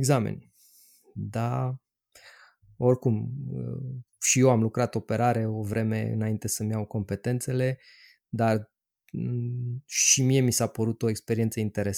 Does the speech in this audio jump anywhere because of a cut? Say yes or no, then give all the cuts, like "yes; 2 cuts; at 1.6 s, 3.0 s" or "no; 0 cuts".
no; 0 cuts